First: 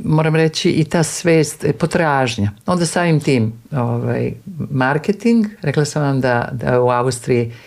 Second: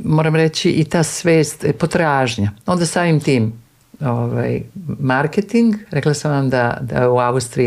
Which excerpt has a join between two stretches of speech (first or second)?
first